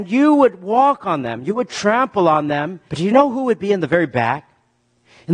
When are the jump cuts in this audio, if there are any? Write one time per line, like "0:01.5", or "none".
0:02.9